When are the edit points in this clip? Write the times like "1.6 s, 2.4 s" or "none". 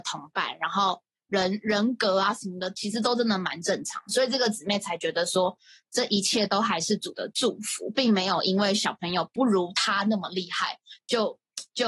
none

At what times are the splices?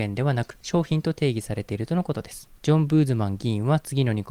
none

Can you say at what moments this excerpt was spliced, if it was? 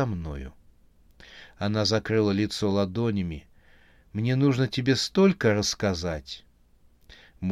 none

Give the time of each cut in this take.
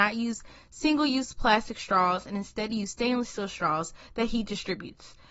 none

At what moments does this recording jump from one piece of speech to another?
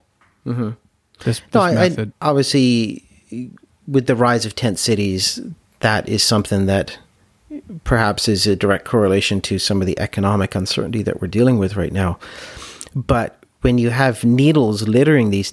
2.1 s

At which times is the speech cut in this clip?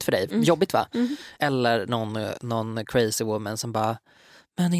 none

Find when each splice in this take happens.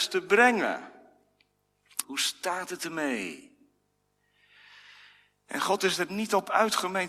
2.0 s

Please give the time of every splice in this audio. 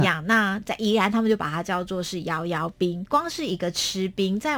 3.1 s

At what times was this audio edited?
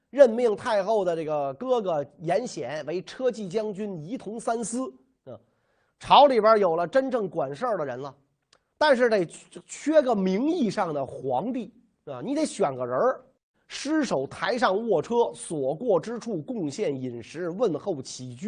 13.5 s

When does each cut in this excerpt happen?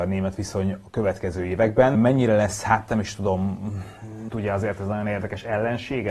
1.9 s, 4.3 s

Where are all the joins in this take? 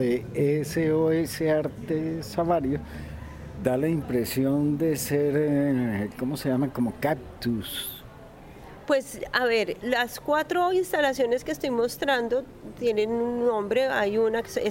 9.8 s

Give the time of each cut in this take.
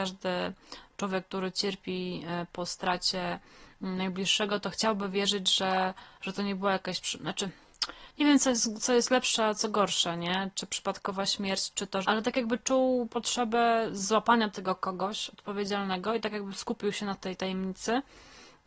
12.0 s

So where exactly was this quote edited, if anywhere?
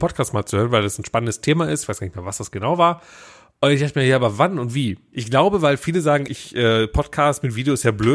5.1 s, 6.3 s

